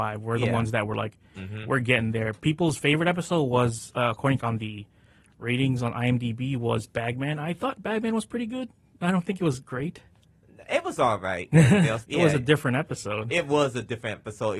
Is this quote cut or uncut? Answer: cut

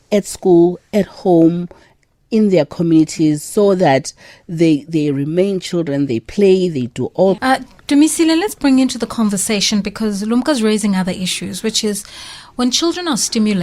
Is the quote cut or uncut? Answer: cut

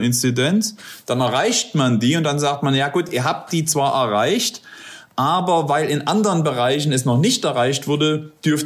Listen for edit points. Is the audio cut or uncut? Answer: uncut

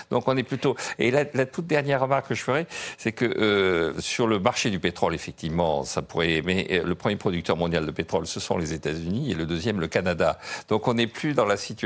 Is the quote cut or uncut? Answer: uncut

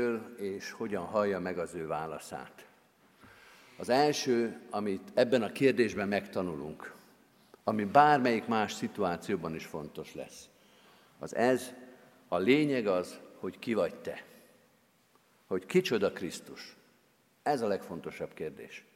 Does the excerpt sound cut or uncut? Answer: uncut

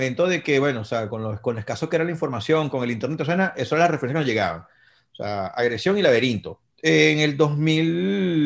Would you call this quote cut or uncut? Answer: cut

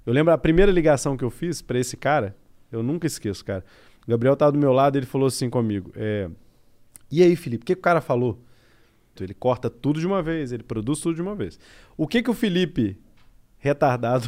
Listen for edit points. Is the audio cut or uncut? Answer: cut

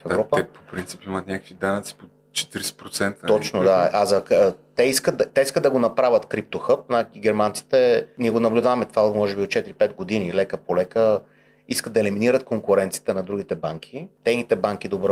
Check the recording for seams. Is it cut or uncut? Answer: uncut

